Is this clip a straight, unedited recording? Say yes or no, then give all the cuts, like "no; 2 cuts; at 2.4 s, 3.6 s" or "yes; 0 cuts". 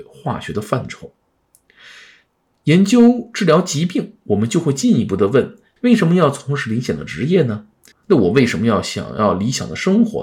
no; 2 cuts; at 5.8 s, 7.9 s